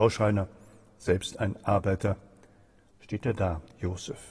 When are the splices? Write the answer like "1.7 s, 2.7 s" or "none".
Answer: 2.9 s